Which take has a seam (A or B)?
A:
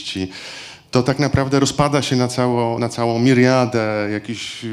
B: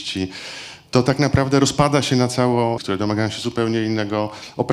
B